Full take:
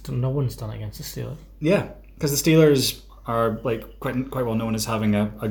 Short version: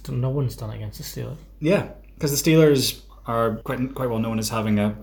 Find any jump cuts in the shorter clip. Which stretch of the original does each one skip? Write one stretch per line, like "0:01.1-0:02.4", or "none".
0:03.6-0:04.0

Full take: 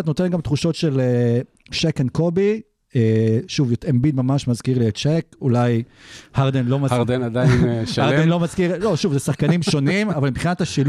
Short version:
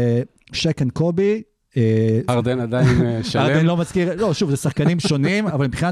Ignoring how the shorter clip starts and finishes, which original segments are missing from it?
0:03.5-0:06.9

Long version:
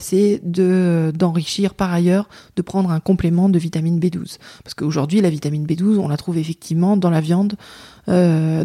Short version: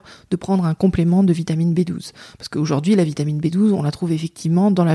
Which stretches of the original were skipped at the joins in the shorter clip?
none

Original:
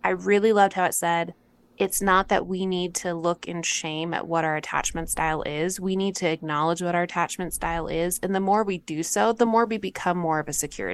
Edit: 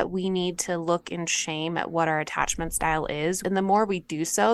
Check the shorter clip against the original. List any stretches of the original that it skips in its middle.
0:05.8-0:08.2

